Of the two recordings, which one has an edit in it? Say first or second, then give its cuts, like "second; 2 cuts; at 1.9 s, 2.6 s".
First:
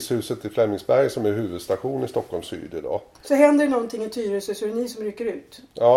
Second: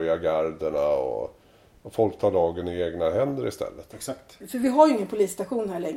second; 1 cut; at 4.4 s